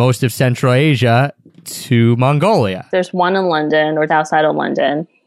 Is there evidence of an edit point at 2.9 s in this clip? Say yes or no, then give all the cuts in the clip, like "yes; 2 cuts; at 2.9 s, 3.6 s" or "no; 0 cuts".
yes; 2 cuts; at 2.9 s, 4.1 s